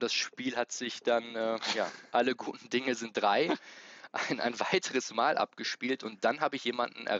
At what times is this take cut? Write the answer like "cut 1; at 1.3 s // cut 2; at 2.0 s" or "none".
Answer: none